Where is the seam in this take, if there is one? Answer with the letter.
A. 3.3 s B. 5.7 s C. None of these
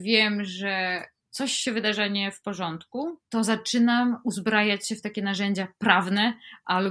A